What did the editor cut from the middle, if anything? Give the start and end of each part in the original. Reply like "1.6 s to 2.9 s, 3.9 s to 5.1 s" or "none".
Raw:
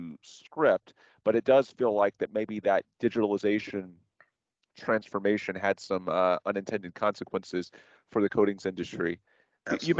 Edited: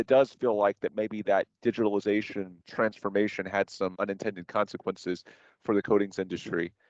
4.0 s to 4.7 s, 6.0 s to 6.4 s